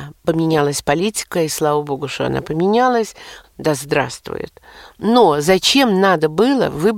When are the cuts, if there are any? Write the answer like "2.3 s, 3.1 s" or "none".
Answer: 3.4 s